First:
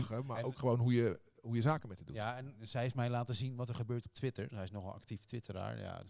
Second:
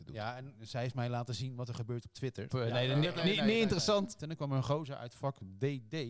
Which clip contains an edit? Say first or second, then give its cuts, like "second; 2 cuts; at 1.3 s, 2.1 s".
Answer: second; 2 cuts; at 2.5 s, 4.2 s